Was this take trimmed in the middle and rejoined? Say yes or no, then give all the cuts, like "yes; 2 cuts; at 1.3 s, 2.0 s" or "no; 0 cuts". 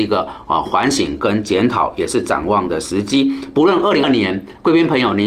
yes; 1 cut; at 4.0 s